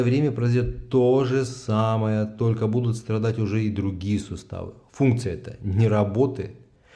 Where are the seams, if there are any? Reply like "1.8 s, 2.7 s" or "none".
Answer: none